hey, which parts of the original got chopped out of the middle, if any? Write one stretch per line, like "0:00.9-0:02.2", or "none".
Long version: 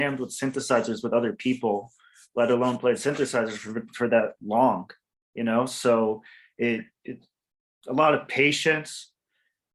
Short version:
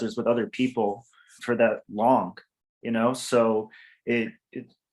0:02.2-0:03.9

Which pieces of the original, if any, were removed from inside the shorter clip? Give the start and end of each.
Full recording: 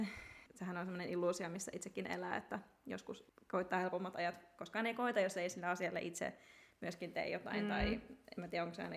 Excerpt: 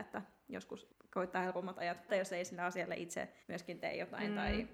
0:04.5-0:05.1
0:06.5-0:06.7

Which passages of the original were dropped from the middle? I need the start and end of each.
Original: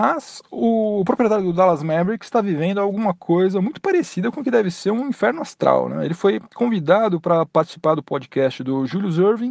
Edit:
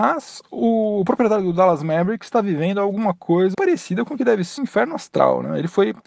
0:03.5-0:03.8
0:04.8-0:05.0

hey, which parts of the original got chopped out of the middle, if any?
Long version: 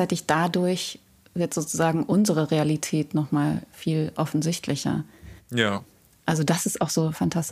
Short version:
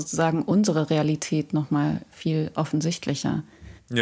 none

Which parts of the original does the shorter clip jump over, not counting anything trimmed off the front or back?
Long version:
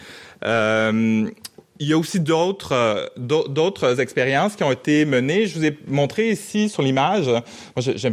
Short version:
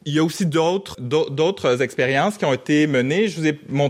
0:02.7-0:03.1

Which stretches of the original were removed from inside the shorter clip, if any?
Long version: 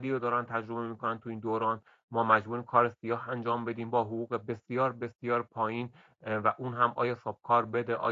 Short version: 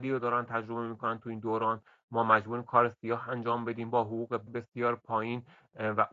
0:04.5-0:04.9

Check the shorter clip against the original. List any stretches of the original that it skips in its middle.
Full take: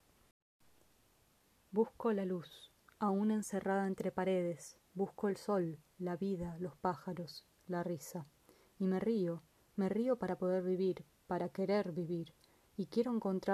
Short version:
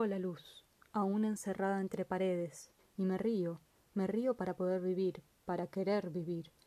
0:04.9-0:08.6

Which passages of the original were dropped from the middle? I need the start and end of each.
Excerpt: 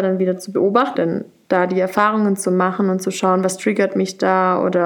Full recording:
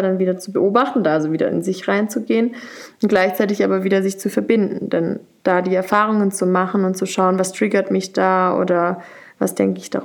0:00.9-0:04.9

